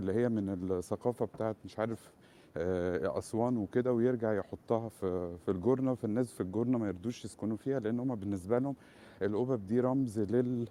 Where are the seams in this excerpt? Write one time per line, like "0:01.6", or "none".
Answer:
0:04.9